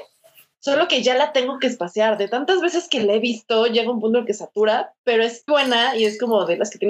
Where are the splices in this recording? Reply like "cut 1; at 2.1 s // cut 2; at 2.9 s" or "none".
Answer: cut 1; at 5.5 s

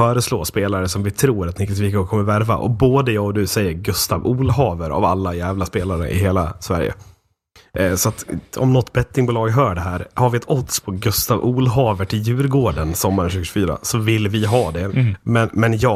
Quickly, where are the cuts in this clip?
cut 1; at 14.9 s

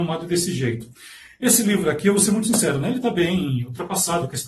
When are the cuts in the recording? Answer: none

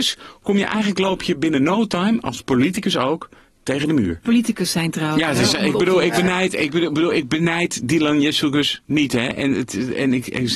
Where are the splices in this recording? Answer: cut 1; at 4.2 s

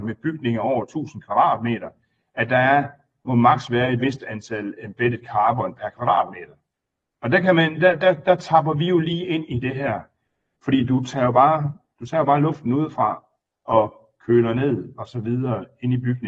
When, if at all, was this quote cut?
cut 1; at 10.6 s

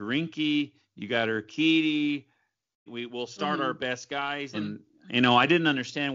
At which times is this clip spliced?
cut 1; at 2.9 s // cut 2; at 4.5 s

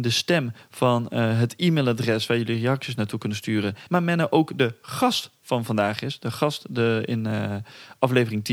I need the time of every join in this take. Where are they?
cut 1; at 3.9 s

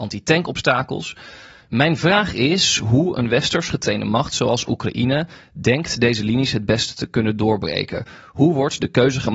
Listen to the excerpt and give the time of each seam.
none

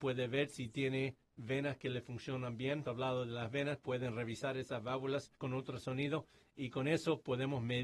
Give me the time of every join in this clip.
cut 1; at 2.9 s // cut 2; at 5.4 s

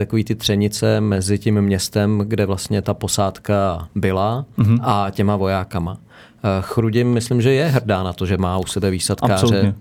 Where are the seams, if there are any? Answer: none

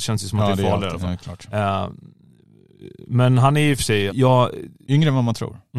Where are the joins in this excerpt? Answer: cut 1; at 4.1 s

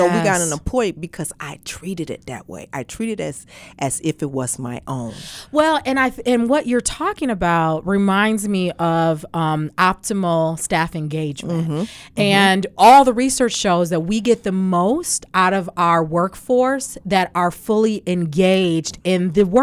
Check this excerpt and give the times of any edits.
none

